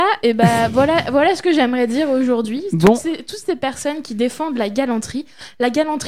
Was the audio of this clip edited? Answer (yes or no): no